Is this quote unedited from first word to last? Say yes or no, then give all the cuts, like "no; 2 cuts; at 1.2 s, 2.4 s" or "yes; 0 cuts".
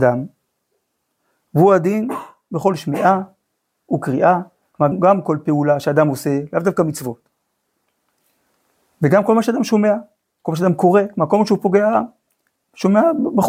no; 1 cut; at 4.9 s